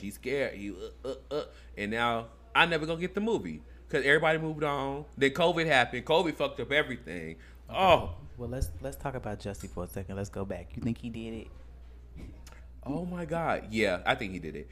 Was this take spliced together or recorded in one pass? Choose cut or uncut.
uncut